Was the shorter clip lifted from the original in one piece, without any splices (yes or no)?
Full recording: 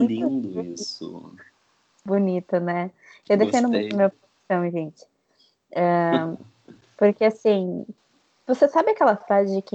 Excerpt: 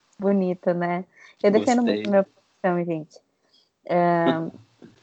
yes